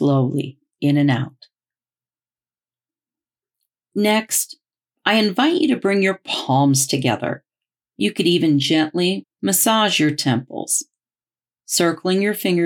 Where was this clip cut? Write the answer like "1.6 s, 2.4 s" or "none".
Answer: 7.8 s, 9.2 s